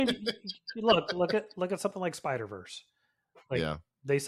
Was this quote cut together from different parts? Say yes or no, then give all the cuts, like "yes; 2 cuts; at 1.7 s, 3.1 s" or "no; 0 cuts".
no; 0 cuts